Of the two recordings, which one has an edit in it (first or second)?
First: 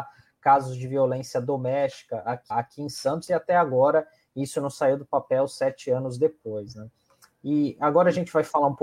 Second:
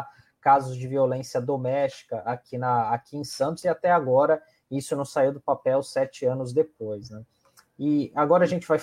first